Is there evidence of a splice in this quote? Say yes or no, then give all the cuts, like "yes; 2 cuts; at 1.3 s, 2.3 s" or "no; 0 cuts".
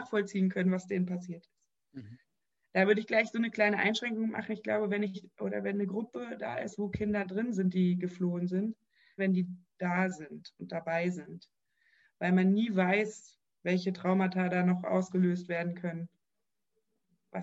yes; 1 cut; at 9.2 s